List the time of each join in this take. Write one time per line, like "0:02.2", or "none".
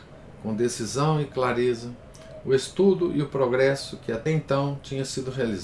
none